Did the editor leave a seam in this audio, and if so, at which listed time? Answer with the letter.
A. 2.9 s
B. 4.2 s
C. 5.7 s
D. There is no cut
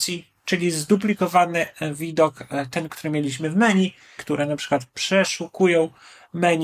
B